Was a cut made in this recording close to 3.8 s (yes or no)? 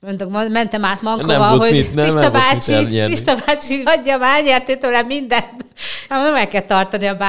yes